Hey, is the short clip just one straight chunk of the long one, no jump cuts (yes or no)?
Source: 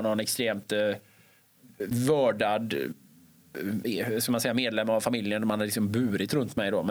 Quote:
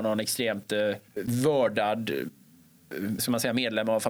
no